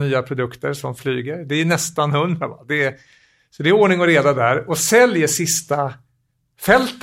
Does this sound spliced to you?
no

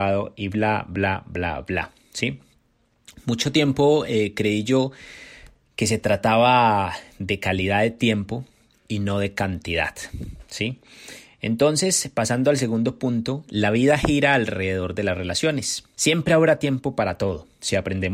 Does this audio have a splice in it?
yes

